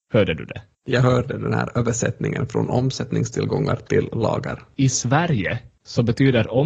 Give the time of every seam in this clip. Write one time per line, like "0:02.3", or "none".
0:04.8

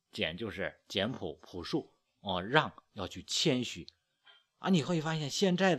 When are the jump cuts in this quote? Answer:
none

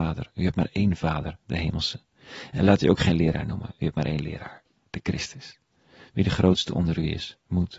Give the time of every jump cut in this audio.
none

